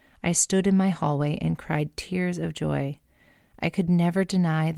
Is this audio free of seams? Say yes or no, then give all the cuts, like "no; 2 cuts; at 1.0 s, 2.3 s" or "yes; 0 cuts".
yes; 0 cuts